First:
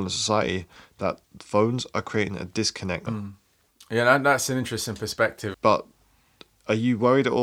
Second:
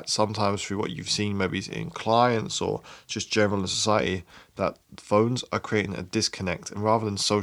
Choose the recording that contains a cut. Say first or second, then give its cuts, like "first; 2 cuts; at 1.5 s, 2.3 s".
first; 2 cuts; at 3.1 s, 5.5 s